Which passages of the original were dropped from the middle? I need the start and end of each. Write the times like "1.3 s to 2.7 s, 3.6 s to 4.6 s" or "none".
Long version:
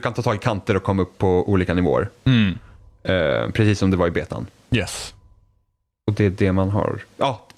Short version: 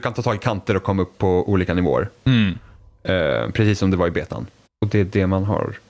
4.7 s to 5.9 s